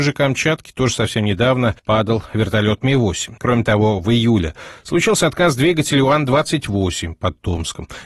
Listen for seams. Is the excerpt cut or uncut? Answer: cut